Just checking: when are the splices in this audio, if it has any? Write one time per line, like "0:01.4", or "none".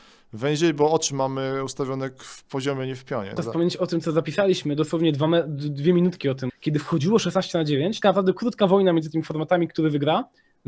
0:03.4
0:06.5
0:08.0